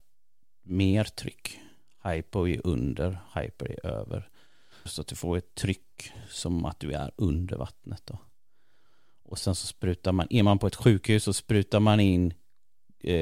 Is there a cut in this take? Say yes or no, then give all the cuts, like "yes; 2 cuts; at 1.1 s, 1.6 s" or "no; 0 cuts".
yes; 1 cut; at 4.9 s